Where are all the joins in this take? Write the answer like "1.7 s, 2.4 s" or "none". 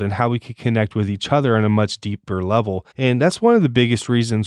2.9 s